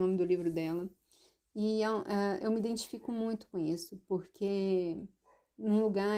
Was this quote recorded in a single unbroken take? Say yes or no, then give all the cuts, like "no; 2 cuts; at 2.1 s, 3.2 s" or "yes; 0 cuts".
yes; 0 cuts